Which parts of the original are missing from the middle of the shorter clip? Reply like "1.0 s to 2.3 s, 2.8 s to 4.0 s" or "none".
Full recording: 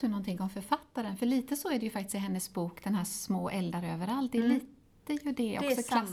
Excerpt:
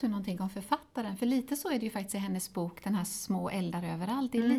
none